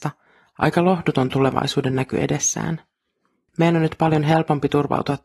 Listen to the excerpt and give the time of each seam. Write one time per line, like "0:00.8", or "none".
0:03.5